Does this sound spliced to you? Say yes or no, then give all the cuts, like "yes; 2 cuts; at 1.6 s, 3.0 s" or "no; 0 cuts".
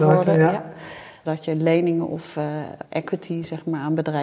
yes; 2 cuts; at 1.2 s, 2.8 s